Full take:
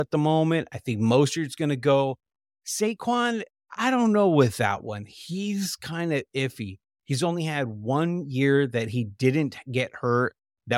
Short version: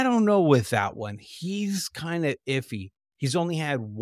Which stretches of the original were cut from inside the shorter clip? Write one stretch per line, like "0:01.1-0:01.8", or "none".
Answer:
none